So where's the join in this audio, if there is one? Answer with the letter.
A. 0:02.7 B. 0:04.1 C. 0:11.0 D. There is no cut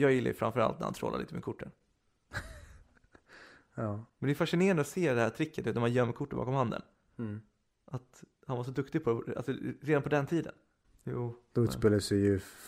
C